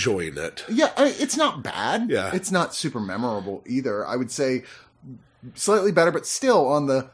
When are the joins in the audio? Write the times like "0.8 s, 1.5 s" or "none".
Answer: none